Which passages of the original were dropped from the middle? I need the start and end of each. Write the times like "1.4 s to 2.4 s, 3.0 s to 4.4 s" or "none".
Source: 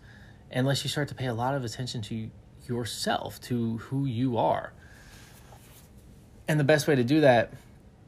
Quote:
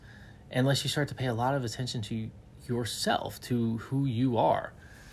none

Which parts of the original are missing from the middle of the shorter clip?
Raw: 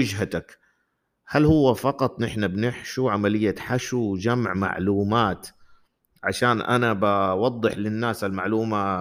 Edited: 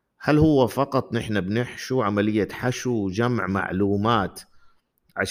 none

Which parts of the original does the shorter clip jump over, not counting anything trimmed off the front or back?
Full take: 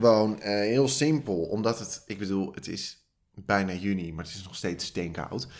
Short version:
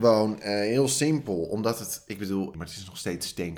2.5 s to 4.1 s

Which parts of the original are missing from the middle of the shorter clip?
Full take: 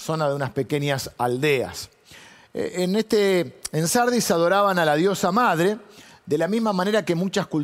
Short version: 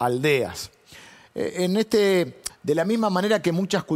3.7 s to 6.1 s

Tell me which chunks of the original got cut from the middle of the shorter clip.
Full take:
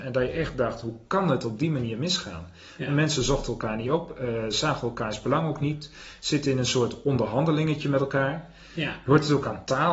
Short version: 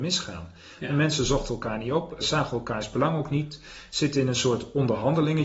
4.2 s to 4.5 s

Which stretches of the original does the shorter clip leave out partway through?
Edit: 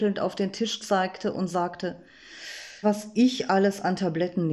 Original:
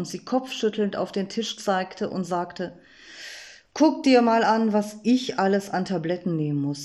3.6 s to 4.7 s

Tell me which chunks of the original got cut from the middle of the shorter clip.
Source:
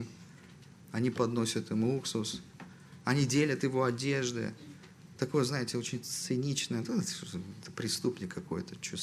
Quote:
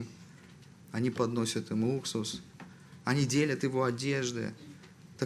none

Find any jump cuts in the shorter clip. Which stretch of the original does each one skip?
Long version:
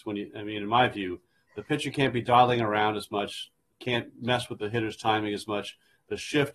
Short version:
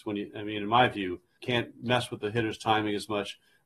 1.4 s to 3.8 s

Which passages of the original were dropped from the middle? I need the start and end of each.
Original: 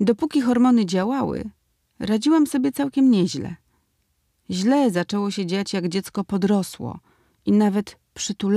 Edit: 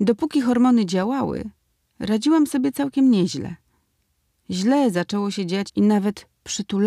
5.7 s to 7.4 s

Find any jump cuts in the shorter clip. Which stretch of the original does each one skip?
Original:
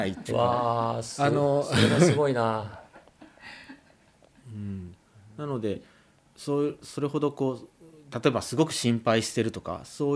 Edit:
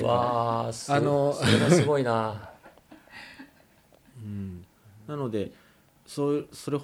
none

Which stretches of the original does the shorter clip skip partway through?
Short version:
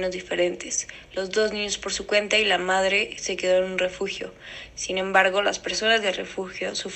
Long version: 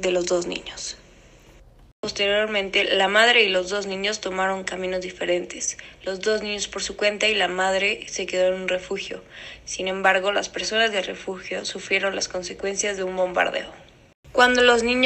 none

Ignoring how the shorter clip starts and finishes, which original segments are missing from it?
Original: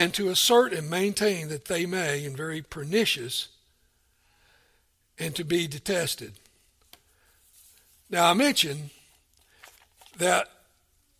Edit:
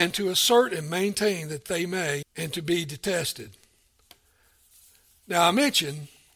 2.2 s to 5.0 s

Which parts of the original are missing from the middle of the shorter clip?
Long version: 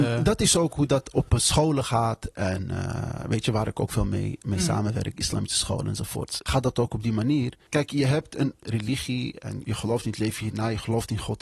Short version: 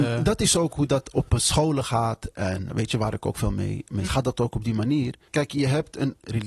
2.7 s to 3.2 s, 4.6 s to 6.4 s

